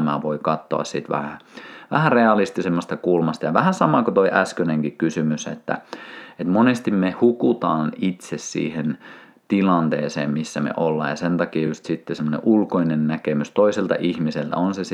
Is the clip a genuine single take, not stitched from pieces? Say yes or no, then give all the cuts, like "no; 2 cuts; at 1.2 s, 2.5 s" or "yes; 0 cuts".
yes; 0 cuts